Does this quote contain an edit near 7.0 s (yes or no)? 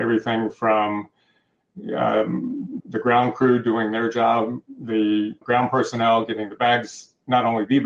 no